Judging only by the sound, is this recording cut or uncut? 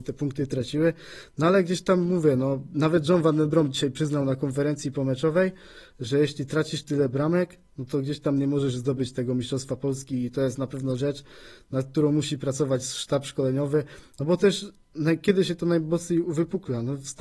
uncut